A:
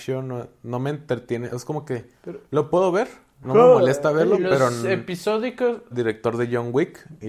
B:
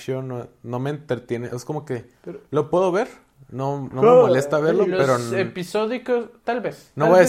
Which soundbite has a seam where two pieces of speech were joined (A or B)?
A